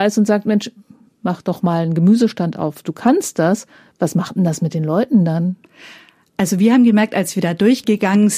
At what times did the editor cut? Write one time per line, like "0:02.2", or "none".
none